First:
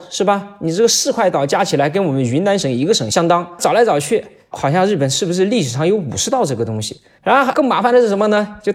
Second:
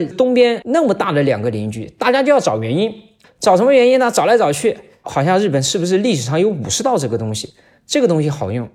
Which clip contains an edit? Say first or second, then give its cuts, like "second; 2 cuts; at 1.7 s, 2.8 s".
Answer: first; 2 cuts; at 3.6 s, 7.2 s